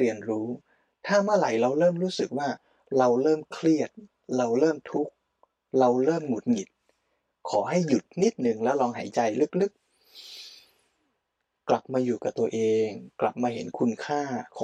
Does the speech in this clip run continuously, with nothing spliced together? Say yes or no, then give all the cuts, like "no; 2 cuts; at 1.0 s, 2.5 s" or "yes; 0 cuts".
yes; 0 cuts